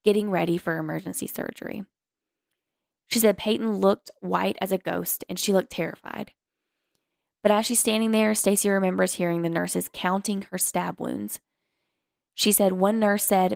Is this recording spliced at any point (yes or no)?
no